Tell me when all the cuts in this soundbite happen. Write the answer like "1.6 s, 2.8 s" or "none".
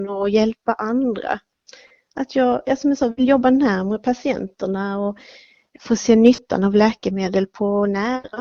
none